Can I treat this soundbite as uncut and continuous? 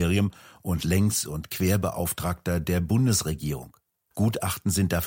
no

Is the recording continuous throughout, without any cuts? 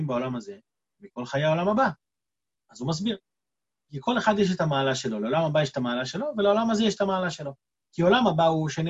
no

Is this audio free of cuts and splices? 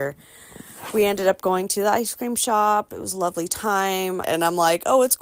no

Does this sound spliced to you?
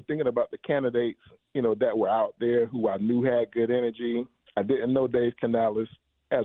no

